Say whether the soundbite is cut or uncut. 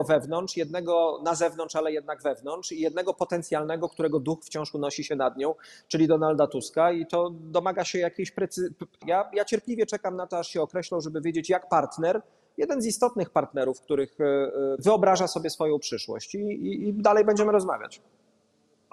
cut